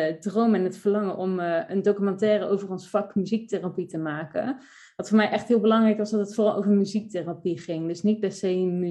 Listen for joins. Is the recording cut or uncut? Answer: uncut